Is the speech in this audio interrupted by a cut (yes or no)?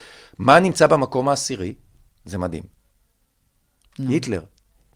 no